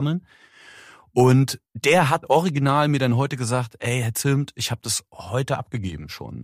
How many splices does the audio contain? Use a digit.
1